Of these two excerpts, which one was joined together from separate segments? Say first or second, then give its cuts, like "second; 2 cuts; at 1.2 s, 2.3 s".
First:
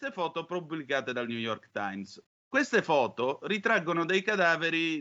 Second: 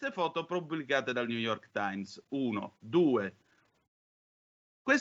first; 1 cut; at 2.3 s